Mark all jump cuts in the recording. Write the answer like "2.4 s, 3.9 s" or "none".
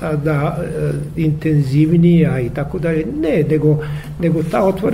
none